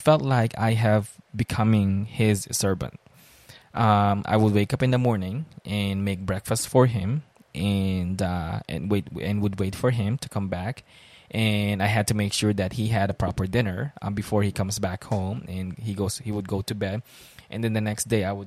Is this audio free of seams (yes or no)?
yes